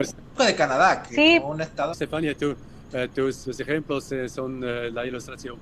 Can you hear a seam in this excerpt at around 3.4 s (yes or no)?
yes